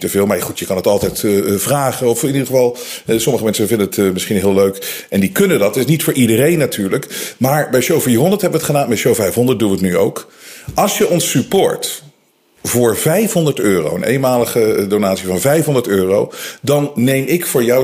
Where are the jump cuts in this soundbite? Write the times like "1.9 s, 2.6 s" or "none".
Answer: none